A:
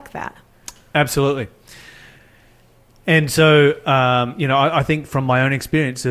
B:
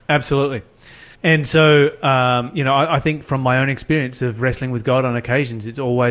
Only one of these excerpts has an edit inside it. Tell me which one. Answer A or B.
B